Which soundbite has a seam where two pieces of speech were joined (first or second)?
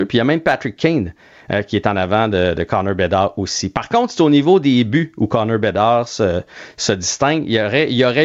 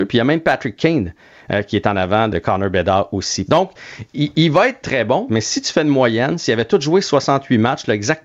second